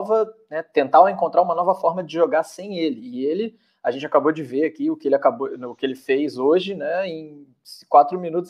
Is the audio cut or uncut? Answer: uncut